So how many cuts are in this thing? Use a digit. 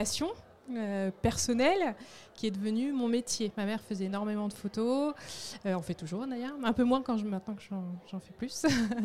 1